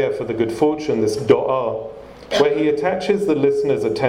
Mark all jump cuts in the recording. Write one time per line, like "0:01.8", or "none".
0:02.3